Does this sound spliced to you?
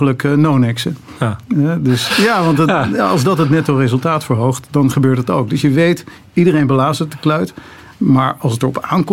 yes; 1 cut; at 2.1 s

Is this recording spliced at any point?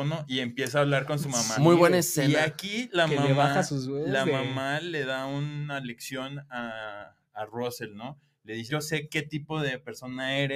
yes; 1 cut; at 8.7 s

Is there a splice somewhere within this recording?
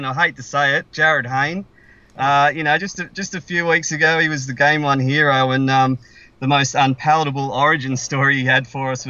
no; 0 cuts

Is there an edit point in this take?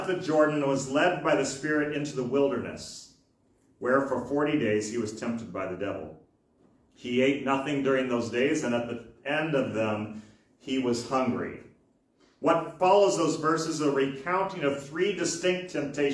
no; 0 cuts

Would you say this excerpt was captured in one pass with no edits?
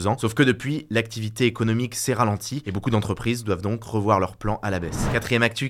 yes; 0 cuts

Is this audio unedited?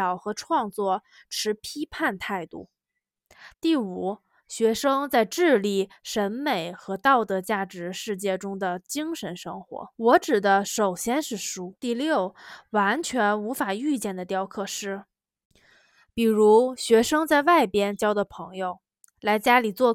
no; 3 cuts; at 3.5 s, 9.9 s, 11.8 s

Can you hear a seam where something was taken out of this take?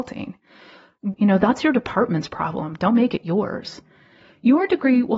yes; 1 cut; at 1.1 s

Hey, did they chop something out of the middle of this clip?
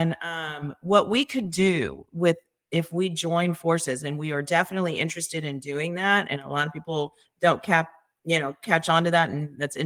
no; 0 cuts

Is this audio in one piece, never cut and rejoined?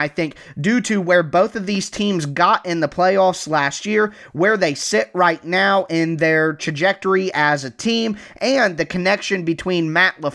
yes; 0 cuts

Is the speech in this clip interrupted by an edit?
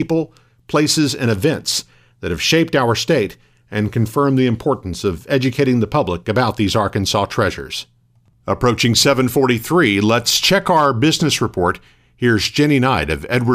no; 0 cuts

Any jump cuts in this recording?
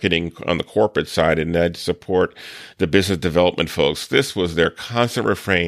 no; 0 cuts

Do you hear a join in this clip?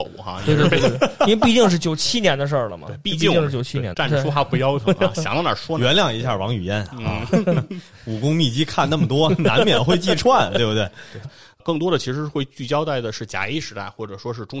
yes; 2 cuts; at 3.9 s, 11.2 s

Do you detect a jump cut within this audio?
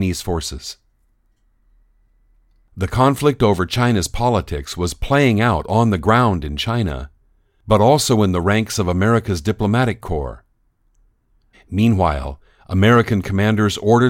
yes; 1 cut; at 11.5 s

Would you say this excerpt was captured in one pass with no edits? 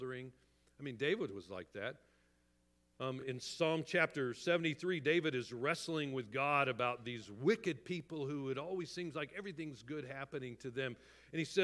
yes; 0 cuts

